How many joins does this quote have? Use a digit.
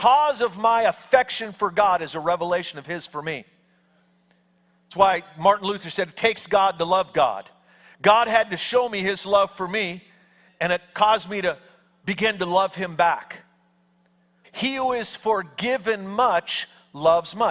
2